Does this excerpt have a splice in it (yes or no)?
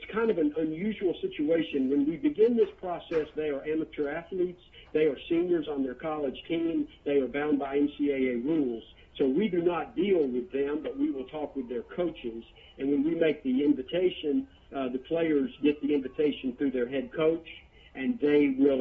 no